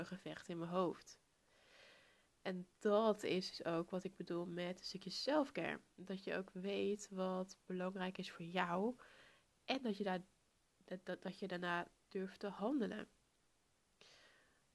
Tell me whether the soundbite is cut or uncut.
uncut